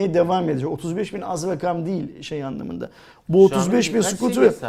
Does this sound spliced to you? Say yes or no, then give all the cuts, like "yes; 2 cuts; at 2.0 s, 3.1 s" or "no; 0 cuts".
no; 0 cuts